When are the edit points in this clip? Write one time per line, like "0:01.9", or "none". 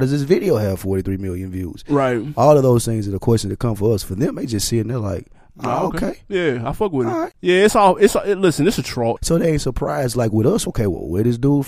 0:09.2
0:10.7